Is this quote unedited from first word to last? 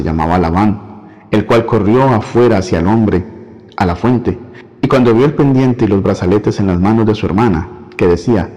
yes; 0 cuts

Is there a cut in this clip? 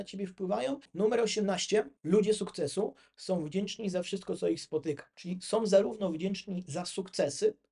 no; 0 cuts

